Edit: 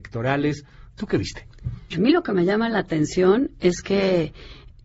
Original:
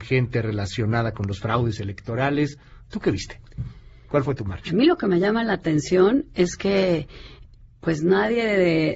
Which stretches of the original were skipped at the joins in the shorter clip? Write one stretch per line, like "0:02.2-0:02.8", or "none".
0:03.8-0:04.7